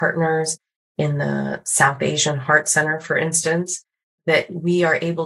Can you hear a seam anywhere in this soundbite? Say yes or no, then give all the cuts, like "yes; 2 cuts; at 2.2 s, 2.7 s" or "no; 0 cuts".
no; 0 cuts